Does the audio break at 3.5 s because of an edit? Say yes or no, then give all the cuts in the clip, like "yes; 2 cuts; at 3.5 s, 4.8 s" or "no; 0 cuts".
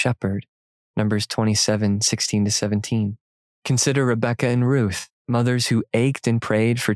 yes; 2 cuts; at 3.5 s, 5.1 s